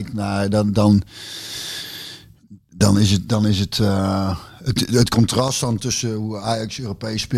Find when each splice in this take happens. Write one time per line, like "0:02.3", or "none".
none